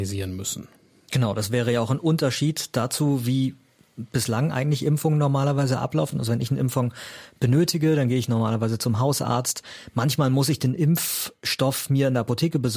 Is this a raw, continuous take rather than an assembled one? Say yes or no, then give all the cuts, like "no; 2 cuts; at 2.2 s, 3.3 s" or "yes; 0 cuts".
yes; 0 cuts